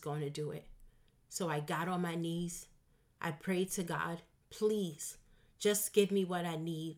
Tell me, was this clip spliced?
yes; 1 cut; at 4.4 s

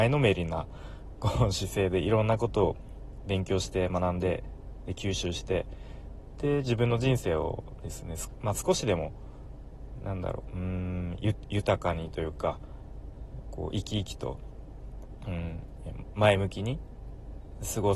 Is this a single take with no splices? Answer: yes; 0 cuts

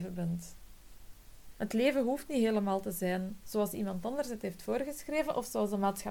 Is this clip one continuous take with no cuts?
no; 1 cut; at 1.6 s

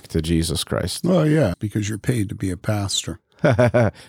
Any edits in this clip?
yes; 1 cut; at 1.5 s

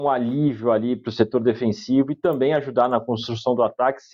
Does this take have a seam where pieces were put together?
no; 0 cuts

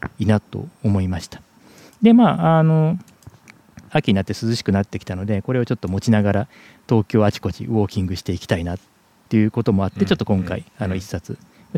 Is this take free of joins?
no; 1 cut; at 3.9 s

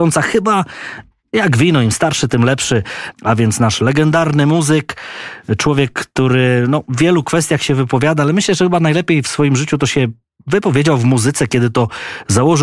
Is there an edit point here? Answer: yes; 1 cut; at 3.1 s

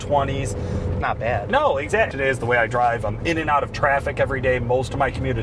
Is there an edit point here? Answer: yes; 2 cuts; at 1.0 s, 2.1 s

